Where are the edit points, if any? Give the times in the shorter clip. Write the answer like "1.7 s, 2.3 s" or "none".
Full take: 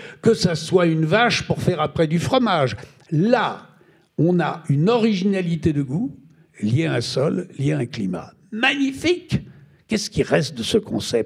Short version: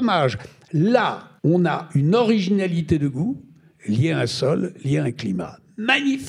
1.4 s